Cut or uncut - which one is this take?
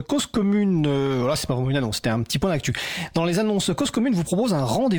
uncut